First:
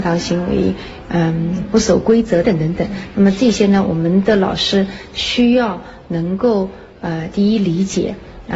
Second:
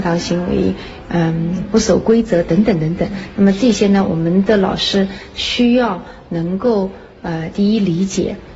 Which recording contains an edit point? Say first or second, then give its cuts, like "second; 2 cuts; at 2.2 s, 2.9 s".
first; 1 cut; at 2.4 s